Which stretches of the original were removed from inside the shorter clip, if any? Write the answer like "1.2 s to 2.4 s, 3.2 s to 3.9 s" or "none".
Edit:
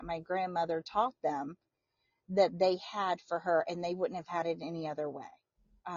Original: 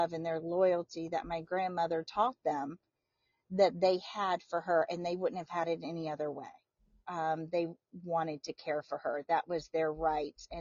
none